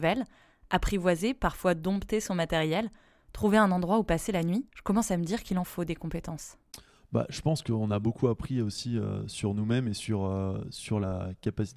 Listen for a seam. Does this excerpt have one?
yes; 1 cut; at 4.7 s

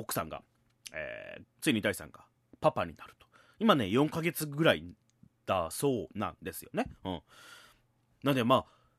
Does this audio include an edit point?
yes; 1 cut; at 1.4 s

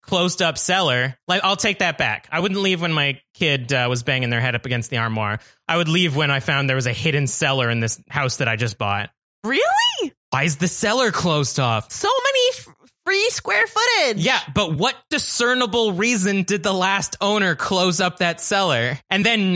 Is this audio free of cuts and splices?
yes; 0 cuts

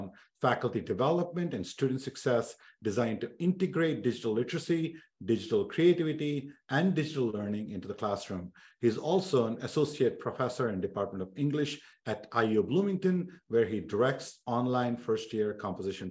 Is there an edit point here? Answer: no; 0 cuts

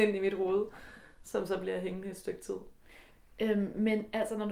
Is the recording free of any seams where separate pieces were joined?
yes; 0 cuts

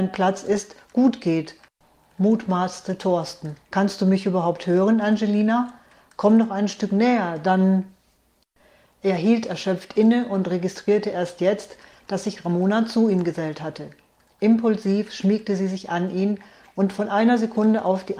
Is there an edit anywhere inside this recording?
yes; 1 cut; at 3.6 s

